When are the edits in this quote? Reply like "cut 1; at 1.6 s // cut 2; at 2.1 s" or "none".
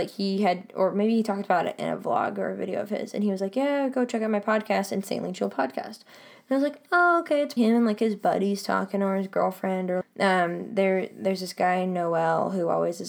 cut 1; at 7.6 s // cut 2; at 10.0 s